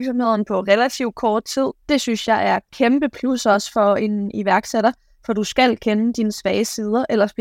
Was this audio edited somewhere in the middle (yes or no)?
yes